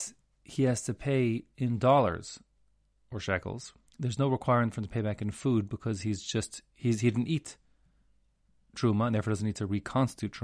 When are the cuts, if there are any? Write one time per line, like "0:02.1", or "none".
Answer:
none

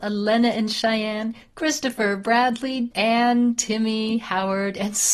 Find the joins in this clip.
0:02.9

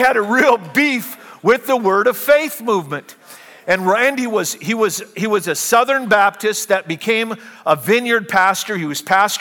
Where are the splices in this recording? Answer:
none

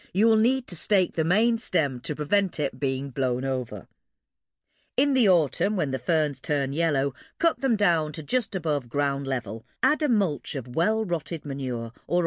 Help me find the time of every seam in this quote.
0:09.8

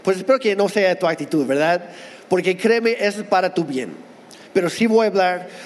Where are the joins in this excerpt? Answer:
none

